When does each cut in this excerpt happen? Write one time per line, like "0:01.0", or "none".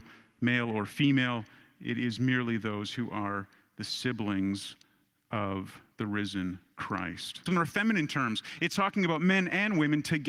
0:07.5

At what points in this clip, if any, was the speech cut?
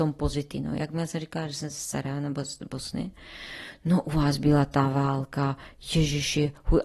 none

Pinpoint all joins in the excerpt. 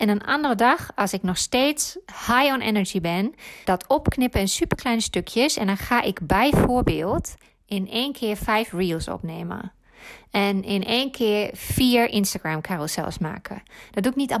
0:03.6

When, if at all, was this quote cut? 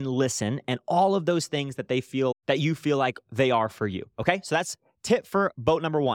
0:02.3

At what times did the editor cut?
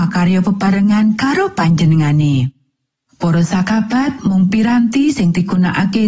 0:03.1

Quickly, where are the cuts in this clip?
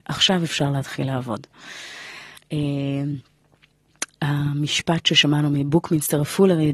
0:02.4

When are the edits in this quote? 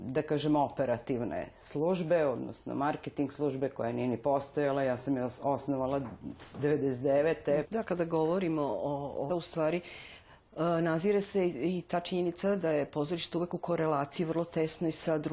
0:07.6
0:09.3

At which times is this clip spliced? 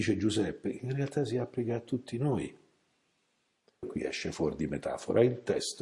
0:03.8

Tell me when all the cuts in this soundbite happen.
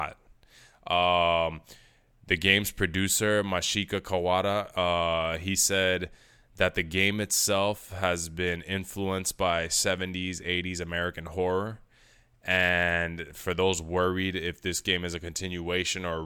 none

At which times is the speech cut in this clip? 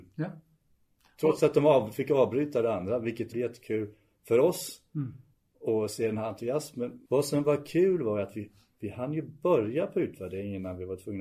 0:03.3
0:07.1

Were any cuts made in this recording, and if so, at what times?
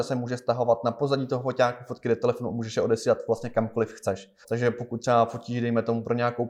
0:04.4

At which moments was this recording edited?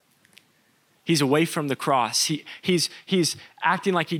none

